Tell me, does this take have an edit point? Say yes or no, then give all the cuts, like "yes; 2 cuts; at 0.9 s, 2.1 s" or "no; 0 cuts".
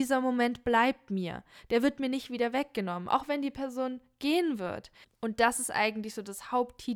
yes; 1 cut; at 5.0 s